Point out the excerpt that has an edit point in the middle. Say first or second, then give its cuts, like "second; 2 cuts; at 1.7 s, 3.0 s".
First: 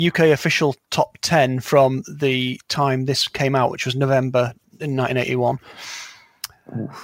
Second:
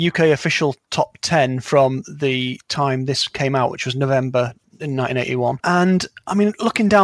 second; 1 cut; at 5.6 s